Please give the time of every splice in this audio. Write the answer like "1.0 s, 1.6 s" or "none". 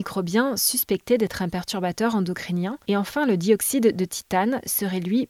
none